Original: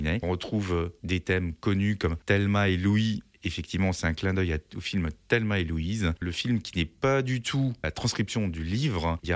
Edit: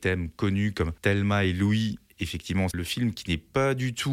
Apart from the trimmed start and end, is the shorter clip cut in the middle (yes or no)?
yes